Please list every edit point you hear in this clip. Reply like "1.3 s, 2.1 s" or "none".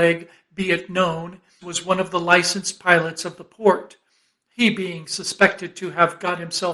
1.6 s